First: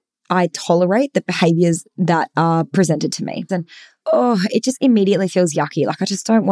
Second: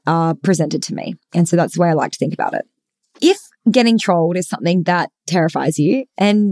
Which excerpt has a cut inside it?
first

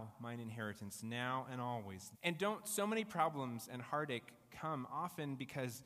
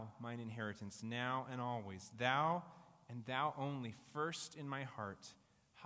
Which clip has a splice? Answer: first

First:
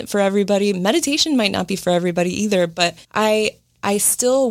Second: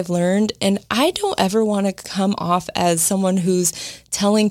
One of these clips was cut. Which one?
first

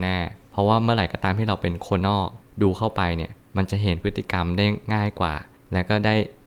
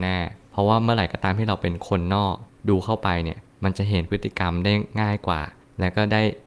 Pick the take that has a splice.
first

